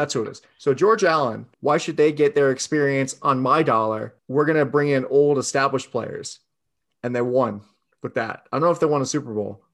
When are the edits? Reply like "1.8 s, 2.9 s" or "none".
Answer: 1.5 s, 4.2 s